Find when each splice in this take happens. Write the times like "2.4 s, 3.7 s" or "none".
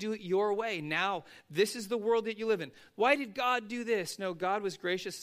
2.9 s